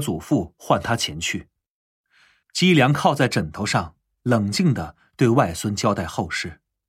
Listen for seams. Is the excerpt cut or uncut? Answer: uncut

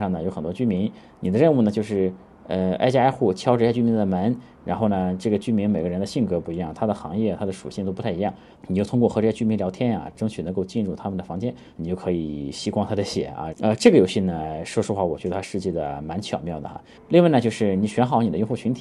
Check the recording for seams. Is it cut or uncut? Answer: cut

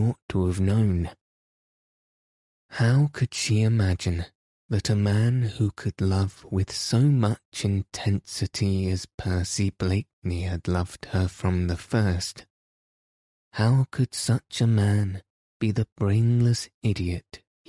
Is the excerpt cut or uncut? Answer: uncut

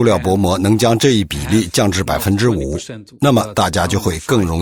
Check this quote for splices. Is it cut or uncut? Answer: uncut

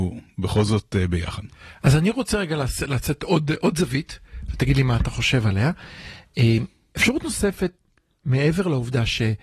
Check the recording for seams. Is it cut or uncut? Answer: uncut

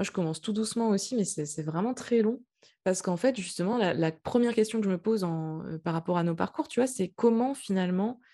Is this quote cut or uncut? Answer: uncut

